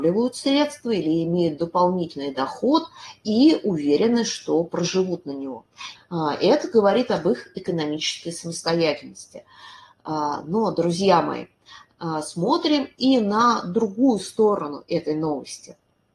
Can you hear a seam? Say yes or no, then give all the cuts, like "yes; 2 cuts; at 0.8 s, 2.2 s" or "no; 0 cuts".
yes; 1 cut; at 6.0 s